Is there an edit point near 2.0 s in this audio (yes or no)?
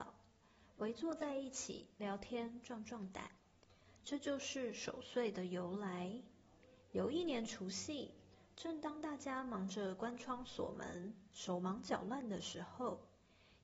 yes